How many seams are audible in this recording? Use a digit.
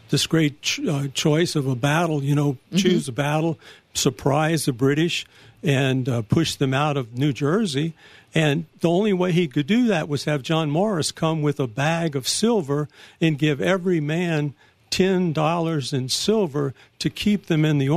0